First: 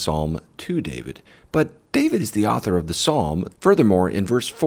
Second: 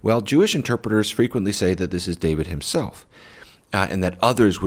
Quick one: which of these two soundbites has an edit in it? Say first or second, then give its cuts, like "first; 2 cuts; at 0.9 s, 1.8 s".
first; 1 cut; at 3.5 s